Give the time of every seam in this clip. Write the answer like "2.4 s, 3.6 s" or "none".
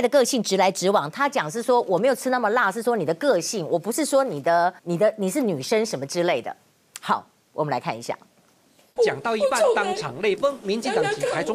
4.8 s, 9.0 s